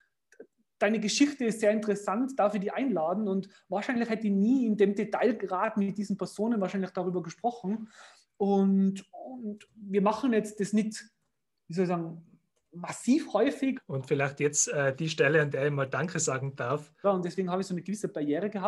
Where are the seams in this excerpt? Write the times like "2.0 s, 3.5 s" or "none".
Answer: 13.7 s, 17.0 s